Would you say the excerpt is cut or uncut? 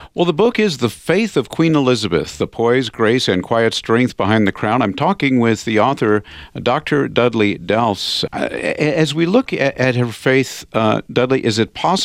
cut